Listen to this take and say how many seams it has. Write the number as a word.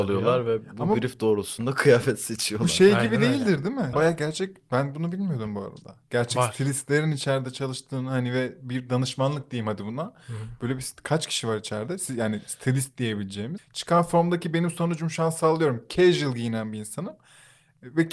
two